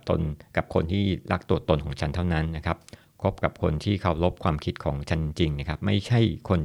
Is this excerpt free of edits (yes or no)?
yes